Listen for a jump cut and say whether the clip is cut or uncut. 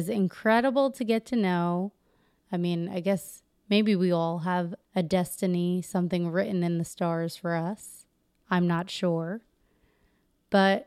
cut